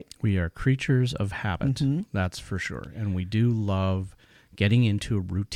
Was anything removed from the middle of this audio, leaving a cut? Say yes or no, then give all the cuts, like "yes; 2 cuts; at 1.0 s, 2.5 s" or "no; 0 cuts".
no; 0 cuts